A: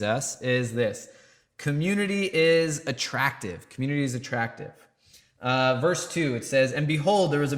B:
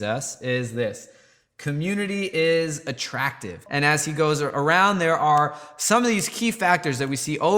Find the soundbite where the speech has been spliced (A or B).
B